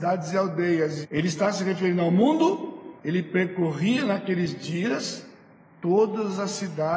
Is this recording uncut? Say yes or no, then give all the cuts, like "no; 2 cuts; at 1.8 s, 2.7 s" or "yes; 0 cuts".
no; 2 cuts; at 1.0 s, 3.0 s